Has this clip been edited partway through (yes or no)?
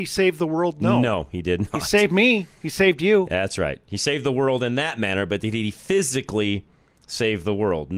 no